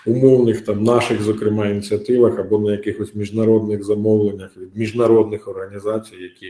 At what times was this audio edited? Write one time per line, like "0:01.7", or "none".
none